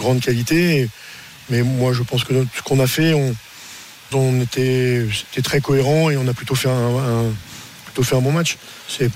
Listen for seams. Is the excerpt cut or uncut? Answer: cut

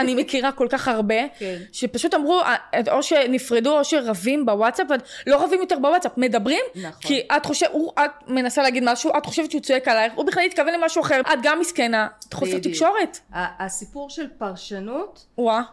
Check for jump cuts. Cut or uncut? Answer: cut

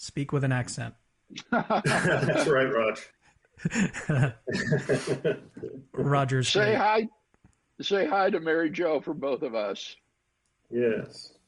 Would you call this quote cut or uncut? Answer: uncut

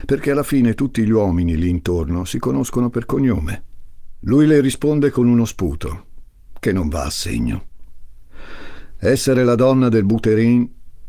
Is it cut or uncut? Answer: uncut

